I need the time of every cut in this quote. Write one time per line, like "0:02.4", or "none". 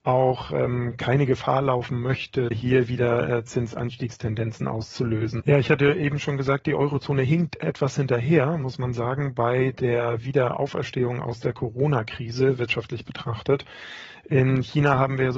0:02.5
0:05.4